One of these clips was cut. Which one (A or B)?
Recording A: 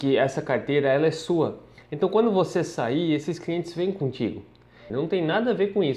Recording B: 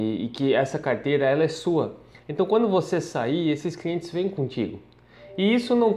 A